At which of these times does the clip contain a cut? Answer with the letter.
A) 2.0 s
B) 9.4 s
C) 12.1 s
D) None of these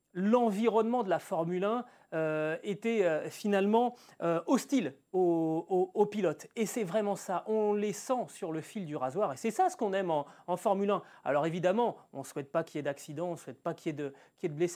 D